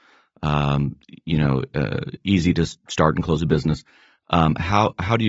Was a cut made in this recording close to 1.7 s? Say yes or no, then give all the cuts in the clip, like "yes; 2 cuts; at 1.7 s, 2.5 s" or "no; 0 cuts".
no; 0 cuts